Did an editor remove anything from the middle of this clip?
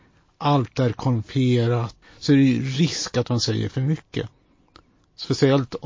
yes; 1 cut; at 2.0 s

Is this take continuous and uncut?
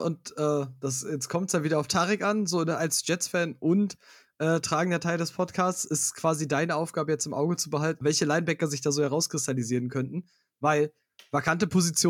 no; 1 cut; at 8.0 s

